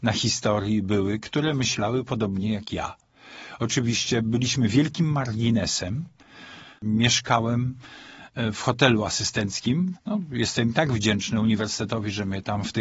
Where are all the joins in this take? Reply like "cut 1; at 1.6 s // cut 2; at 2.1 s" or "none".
cut 1; at 10.0 s